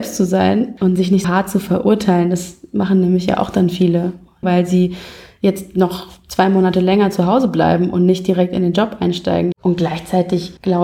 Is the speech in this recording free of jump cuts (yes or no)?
no